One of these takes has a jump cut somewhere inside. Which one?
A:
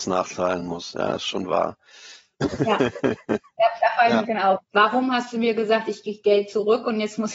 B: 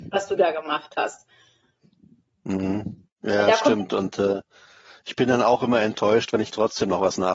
A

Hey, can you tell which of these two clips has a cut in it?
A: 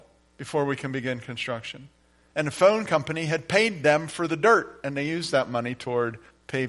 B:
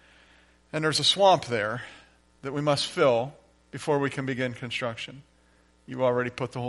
A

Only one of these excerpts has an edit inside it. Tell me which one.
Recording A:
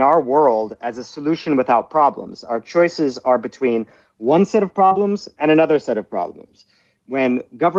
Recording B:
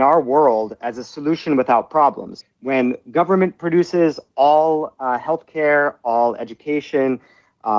B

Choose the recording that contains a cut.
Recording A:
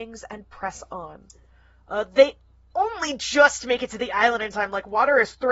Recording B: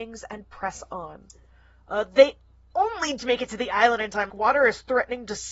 B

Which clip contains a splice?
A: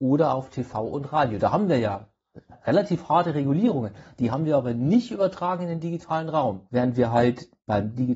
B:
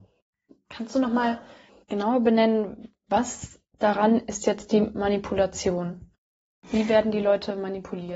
A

